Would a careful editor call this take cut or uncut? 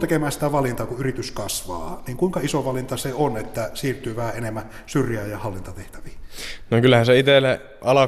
uncut